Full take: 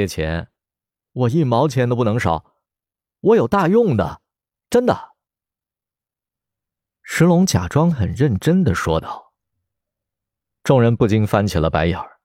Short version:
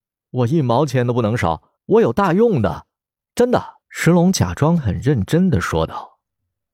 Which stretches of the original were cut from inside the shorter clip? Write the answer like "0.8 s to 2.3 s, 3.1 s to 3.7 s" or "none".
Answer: 2.6 s to 3.1 s, 5.2 s to 6.9 s